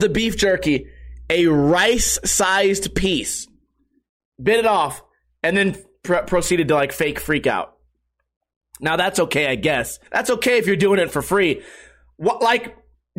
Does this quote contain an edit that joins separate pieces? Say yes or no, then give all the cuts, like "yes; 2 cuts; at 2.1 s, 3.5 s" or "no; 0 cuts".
yes; 1 cut; at 10.1 s